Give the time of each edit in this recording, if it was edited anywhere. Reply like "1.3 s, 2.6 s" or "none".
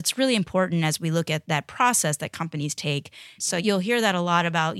3.4 s